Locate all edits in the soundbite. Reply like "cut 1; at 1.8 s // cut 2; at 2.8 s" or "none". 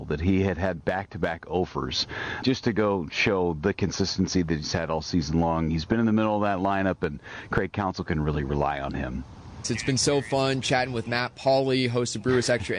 cut 1; at 2.4 s // cut 2; at 9.6 s